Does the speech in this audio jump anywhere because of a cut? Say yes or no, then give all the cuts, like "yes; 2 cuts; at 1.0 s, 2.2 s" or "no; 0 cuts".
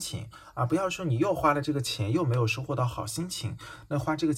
no; 0 cuts